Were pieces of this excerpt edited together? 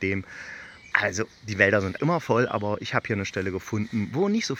yes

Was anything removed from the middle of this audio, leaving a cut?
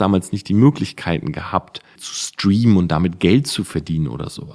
yes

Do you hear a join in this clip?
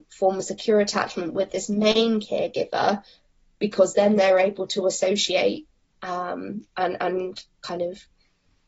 no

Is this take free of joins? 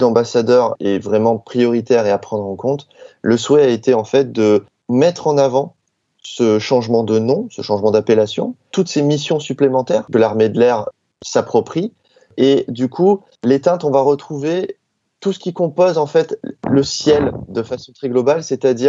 yes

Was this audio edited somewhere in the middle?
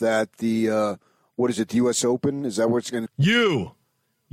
yes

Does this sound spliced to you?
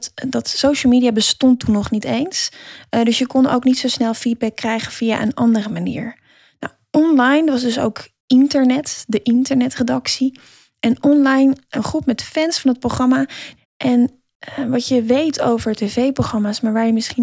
yes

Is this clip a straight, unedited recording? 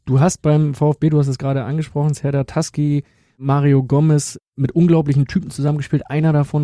yes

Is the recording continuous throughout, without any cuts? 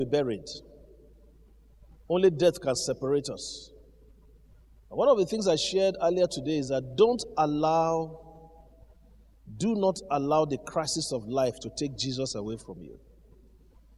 yes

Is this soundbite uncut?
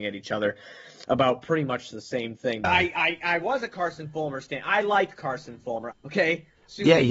no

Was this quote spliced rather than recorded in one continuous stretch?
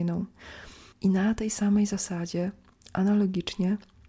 yes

